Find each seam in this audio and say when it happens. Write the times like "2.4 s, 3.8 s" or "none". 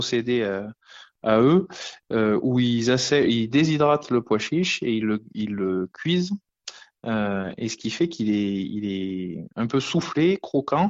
none